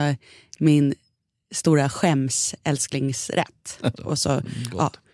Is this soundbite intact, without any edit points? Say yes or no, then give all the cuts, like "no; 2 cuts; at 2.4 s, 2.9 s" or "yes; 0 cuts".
no; 1 cut; at 4.0 s